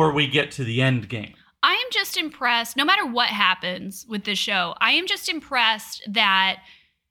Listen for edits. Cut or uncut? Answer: uncut